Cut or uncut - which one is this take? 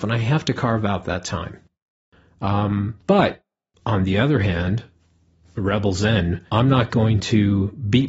cut